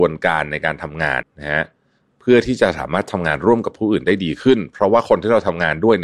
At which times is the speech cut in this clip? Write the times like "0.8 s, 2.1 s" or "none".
1.2 s